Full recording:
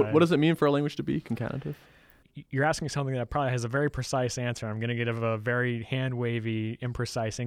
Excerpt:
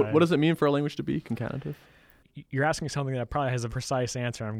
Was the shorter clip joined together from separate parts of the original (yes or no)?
yes